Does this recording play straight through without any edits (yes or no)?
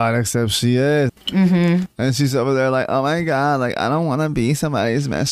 no